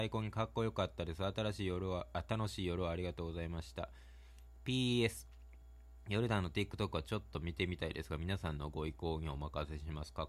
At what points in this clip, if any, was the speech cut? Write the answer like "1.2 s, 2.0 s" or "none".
none